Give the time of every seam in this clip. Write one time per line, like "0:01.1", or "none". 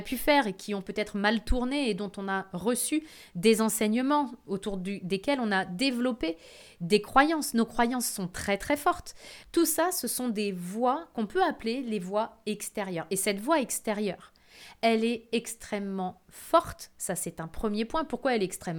0:09.4